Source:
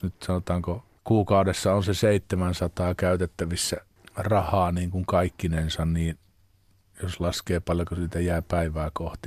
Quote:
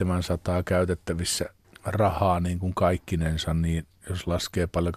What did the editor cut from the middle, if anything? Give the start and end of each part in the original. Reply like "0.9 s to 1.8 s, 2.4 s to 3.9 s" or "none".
6.3 s to 6.9 s